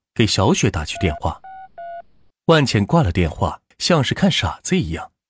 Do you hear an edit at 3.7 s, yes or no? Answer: yes